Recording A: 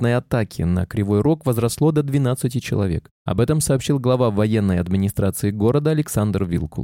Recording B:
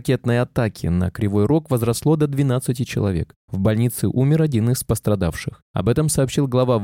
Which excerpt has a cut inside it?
A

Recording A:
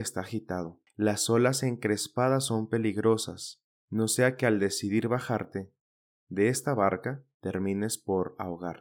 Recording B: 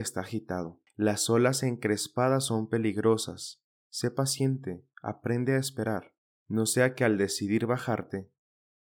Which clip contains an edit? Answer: A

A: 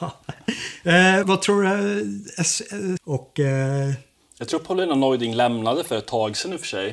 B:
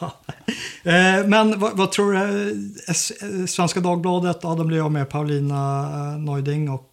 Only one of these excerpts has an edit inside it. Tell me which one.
A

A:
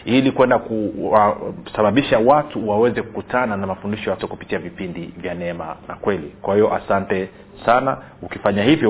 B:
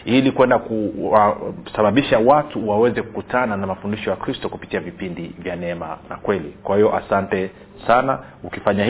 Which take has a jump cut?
A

